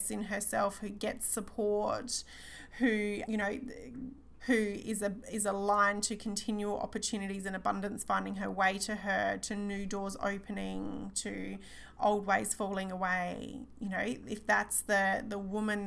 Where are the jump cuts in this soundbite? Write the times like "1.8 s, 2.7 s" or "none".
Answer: 3.3 s, 4.4 s